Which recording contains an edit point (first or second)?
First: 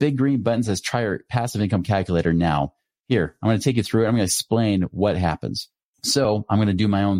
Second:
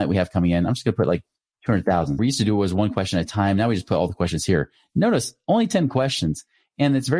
second